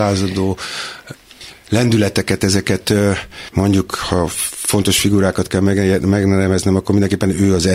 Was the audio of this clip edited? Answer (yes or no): no